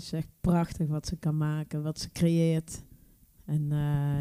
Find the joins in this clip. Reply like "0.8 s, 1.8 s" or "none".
none